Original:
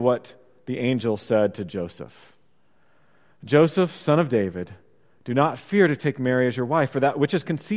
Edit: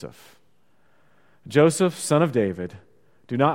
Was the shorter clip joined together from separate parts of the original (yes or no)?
no